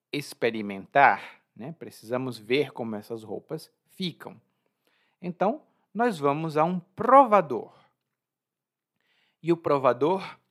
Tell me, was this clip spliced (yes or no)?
no